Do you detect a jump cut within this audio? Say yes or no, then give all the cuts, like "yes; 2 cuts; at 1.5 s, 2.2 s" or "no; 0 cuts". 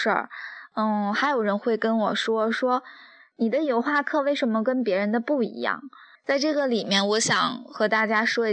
yes; 1 cut; at 6.1 s